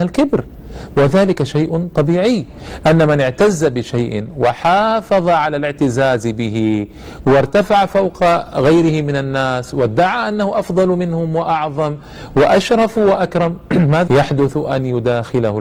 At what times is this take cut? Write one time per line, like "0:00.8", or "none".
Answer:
0:14.1